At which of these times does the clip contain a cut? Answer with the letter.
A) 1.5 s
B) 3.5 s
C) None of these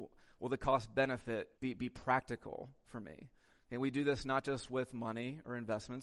A